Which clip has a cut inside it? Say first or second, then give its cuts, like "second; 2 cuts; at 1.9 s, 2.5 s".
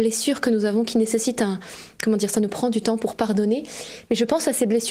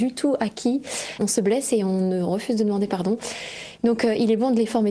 second; 1 cut; at 1.2 s